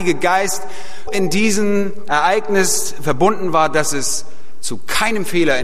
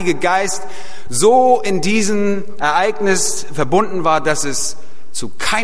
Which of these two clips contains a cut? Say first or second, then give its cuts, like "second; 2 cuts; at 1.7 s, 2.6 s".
first; 1 cut; at 1.1 s